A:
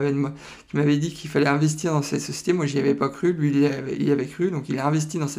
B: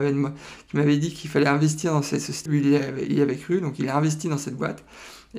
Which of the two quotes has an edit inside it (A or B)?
B